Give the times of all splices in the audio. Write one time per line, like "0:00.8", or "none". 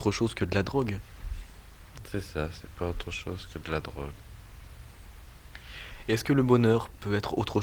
none

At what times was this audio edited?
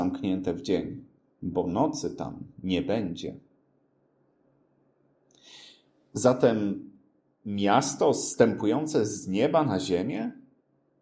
none

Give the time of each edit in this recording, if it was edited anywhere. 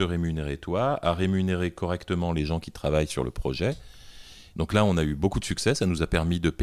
0:04.5

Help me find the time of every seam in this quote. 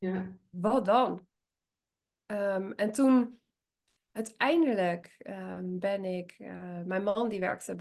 none

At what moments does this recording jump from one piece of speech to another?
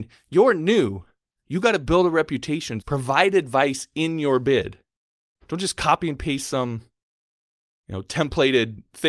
0:02.8
0:05.4

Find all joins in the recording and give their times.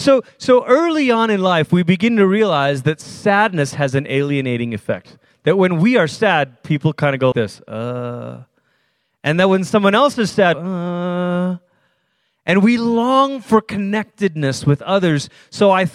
0:07.3
0:10.5

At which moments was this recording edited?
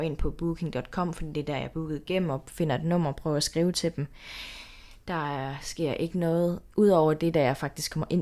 none

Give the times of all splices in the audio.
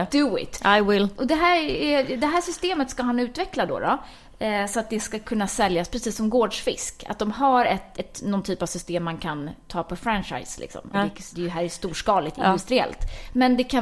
0:07.9
0:10.9

